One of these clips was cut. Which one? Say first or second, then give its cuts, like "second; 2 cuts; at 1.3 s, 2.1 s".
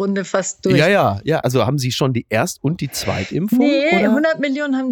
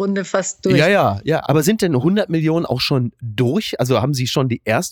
first; 1 cut; at 1.4 s